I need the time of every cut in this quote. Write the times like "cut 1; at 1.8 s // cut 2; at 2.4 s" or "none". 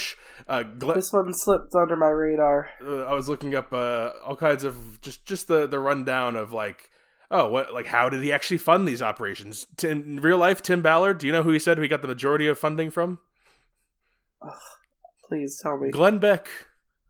none